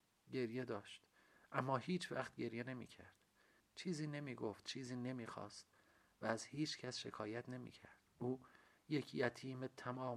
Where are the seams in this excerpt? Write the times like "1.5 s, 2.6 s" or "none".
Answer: 3.6 s, 8.1 s